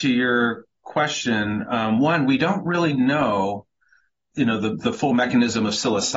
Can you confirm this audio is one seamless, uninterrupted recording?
yes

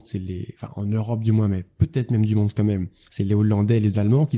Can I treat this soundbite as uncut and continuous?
yes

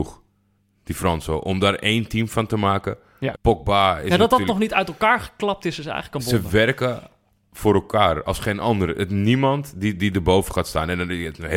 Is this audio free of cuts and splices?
no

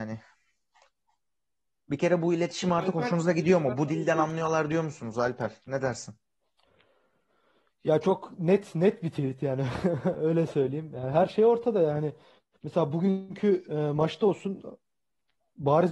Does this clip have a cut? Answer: no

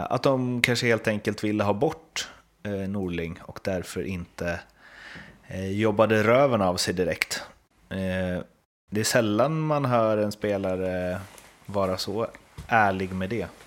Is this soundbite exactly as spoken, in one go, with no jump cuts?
yes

